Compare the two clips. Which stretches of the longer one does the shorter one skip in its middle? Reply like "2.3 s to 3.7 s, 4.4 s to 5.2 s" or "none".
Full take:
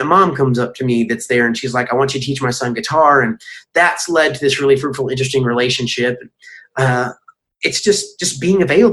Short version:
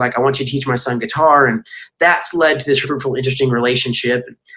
4.6 s to 4.8 s